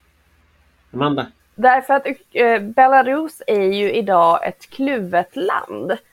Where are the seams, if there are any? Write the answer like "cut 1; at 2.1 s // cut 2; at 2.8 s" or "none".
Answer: cut 1; at 1.4 s